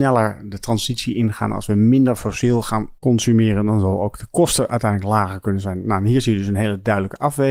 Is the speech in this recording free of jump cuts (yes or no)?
yes